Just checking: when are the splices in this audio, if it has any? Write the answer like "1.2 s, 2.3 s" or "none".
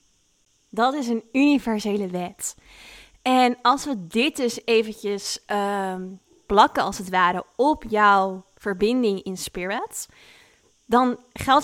none